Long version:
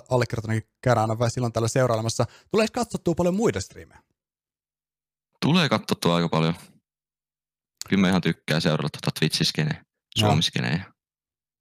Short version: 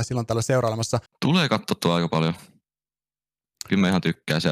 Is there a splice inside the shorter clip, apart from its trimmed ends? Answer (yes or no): yes